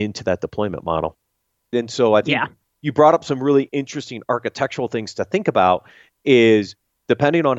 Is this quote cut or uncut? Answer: cut